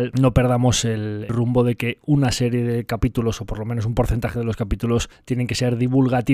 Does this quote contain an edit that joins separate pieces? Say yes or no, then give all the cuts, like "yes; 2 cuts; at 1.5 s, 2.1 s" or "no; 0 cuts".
no; 0 cuts